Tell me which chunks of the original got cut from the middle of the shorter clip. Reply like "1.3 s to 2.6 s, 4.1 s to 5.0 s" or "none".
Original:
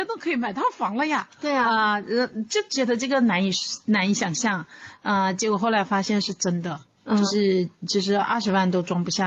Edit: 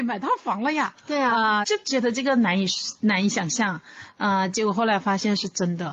2.0 s to 2.5 s